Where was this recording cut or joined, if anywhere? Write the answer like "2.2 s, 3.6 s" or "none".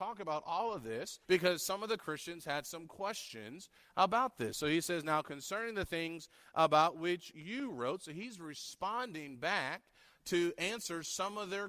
1.2 s